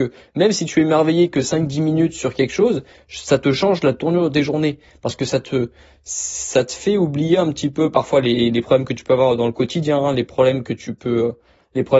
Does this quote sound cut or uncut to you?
uncut